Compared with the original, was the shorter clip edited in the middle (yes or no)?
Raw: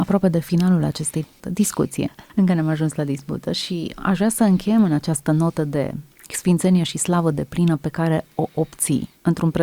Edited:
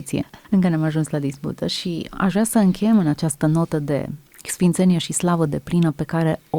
no